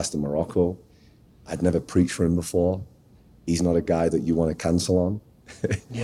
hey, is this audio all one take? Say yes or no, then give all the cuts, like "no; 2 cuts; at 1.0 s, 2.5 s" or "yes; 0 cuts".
yes; 0 cuts